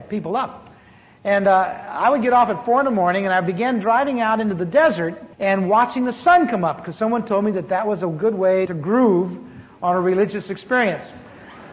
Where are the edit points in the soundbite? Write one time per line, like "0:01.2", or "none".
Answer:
0:05.3
0:08.7

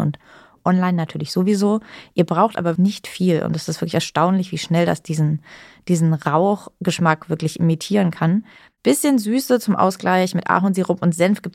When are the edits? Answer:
0:02.8

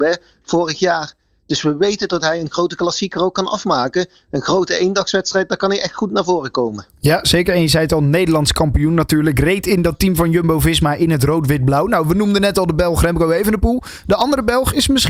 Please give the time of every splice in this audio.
none

